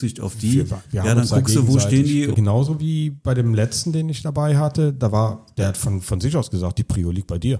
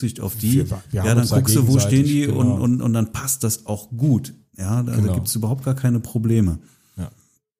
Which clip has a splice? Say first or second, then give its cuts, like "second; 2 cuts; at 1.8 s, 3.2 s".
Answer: first; 1 cut; at 2.3 s